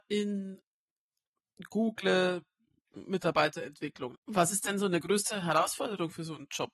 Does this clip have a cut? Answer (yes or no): yes